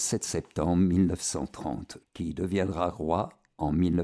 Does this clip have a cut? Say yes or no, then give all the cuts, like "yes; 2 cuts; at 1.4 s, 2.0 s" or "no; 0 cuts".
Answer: yes; 1 cut; at 2.0 s